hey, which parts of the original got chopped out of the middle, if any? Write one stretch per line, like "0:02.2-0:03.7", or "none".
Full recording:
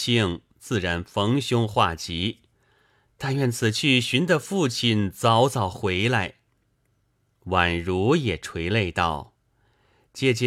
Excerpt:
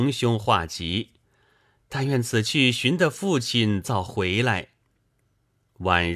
0:05.1-0:05.5